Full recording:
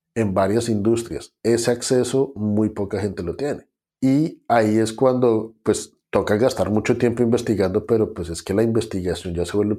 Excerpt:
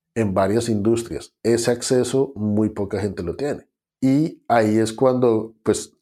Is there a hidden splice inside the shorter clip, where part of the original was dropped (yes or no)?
no